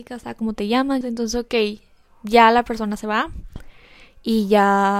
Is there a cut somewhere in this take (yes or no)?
yes